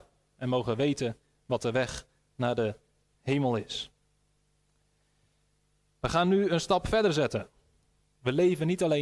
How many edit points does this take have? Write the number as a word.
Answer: zero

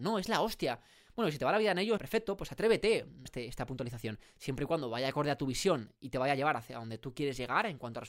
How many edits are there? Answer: two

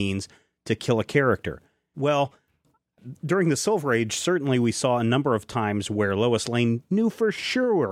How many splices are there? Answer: one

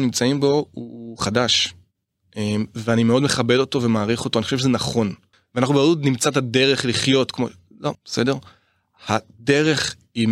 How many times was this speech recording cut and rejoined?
two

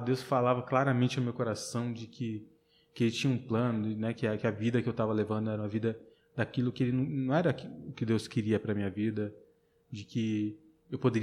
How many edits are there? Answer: zero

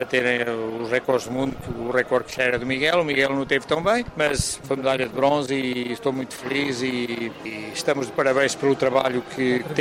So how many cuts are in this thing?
zero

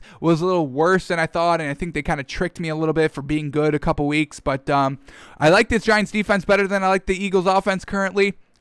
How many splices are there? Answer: zero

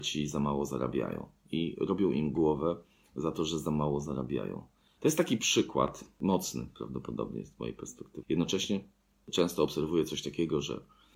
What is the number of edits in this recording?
two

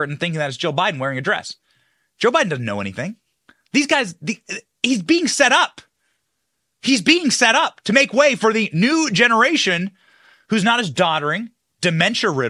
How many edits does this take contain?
one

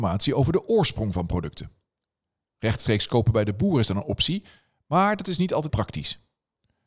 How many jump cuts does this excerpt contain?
one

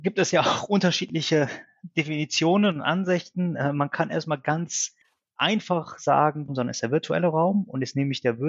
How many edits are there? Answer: one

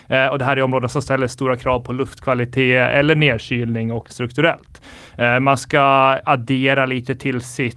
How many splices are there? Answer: one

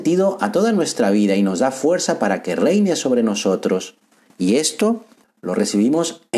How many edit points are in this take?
one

